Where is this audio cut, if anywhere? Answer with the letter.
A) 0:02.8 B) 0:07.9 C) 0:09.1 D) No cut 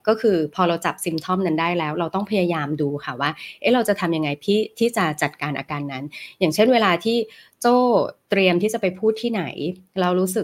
D